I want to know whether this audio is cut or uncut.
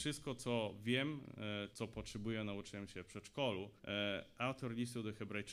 cut